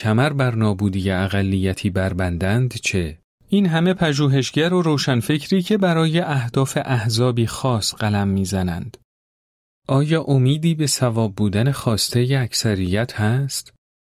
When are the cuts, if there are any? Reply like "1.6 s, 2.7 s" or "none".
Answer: 3.3 s